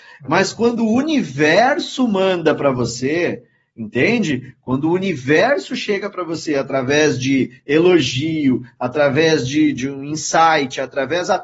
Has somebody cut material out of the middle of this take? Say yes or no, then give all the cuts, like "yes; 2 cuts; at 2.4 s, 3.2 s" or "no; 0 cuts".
no; 0 cuts